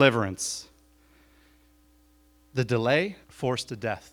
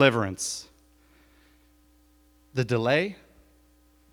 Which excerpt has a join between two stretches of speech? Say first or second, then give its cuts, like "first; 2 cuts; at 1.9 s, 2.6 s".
first; 1 cut; at 3.2 s